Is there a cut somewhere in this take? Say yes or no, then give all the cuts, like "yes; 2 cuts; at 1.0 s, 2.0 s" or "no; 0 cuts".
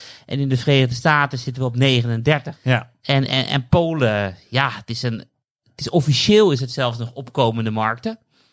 yes; 1 cut; at 2.6 s